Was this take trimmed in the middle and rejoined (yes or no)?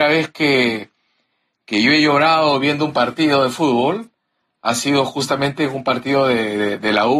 no